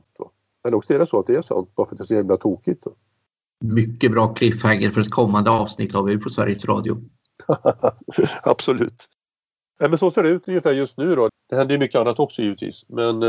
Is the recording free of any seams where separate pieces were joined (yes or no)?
no